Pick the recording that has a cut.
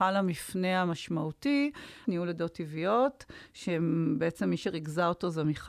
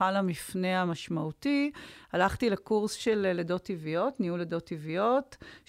first; 1 cut; at 2.0 s

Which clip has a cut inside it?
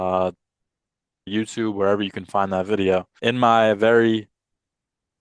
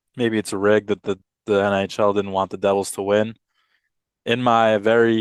first; 2 cuts; at 1.3 s, 3.2 s

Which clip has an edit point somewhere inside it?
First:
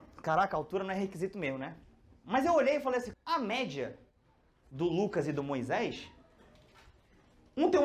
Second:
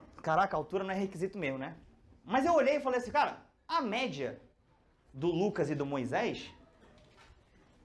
first; 1 cut; at 3.1 s

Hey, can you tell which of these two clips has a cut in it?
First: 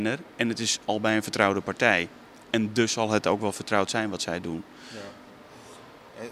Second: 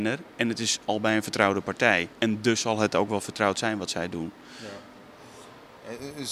second; 1 cut; at 2.1 s

